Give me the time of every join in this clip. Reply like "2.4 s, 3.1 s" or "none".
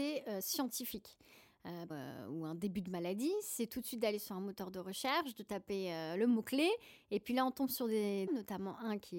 1.9 s, 8.3 s